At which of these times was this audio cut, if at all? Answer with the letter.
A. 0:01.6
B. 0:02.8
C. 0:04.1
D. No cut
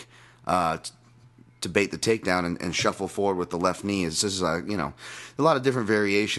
D